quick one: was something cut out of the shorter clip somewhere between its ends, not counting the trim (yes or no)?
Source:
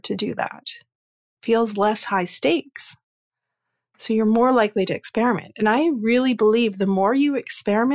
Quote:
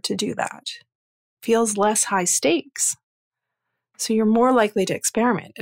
no